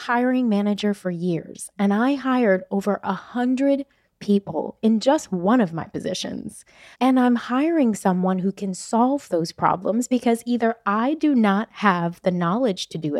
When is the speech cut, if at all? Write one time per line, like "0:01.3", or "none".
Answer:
0:06.9